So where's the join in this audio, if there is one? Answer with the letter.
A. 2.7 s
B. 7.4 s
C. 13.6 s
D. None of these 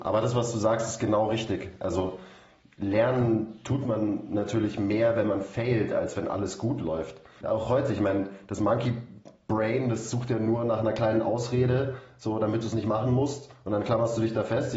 B